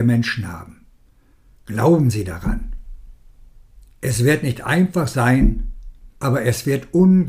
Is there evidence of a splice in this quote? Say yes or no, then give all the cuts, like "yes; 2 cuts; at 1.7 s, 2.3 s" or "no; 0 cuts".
yes; 1 cut; at 6.2 s